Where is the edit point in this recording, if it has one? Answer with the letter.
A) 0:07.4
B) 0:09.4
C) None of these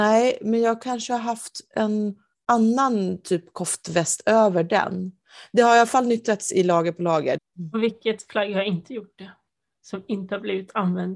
A